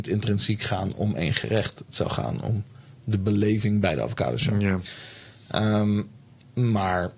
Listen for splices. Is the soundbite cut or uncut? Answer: uncut